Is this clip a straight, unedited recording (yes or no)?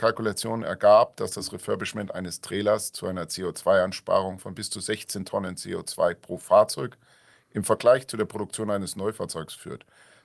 yes